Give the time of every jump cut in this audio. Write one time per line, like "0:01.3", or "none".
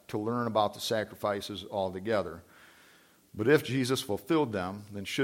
none